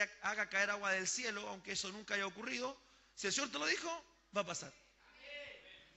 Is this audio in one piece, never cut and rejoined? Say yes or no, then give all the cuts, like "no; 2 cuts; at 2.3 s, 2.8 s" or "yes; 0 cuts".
yes; 0 cuts